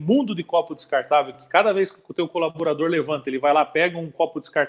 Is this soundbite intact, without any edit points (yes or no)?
yes